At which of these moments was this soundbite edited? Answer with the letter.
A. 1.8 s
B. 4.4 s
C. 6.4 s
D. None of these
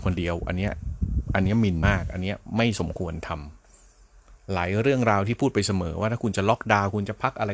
A